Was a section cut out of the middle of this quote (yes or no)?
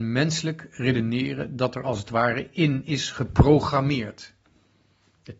no